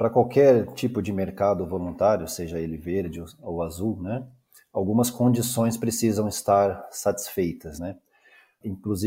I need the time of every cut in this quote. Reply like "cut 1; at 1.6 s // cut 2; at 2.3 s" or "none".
none